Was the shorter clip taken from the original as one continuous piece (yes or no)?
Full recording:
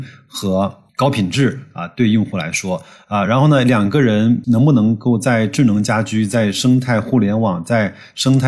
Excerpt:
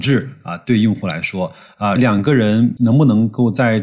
no